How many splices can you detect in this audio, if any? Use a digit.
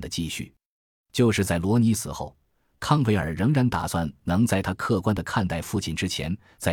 0